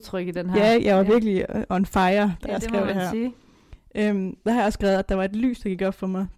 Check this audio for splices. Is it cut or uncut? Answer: uncut